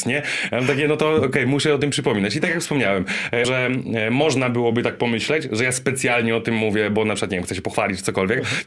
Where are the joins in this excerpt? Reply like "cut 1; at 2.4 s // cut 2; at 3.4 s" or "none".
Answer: cut 1; at 3.4 s